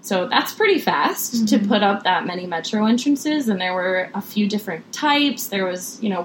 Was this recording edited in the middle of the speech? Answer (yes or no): no